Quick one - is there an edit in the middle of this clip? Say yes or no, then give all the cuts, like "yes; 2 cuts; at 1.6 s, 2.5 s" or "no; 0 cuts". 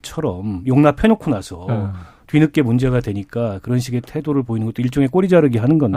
no; 0 cuts